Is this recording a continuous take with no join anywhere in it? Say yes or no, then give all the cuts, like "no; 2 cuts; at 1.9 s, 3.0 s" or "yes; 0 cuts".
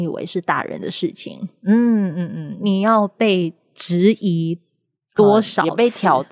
no; 1 cut; at 2.1 s